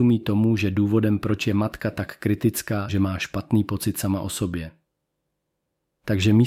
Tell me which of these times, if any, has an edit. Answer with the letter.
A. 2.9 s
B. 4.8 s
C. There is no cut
A